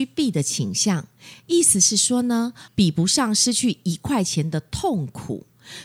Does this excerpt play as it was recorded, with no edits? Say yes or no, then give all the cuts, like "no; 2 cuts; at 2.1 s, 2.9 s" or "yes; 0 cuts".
no; 1 cut; at 2.7 s